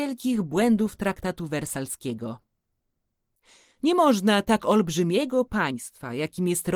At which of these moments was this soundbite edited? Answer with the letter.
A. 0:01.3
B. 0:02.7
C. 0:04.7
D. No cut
D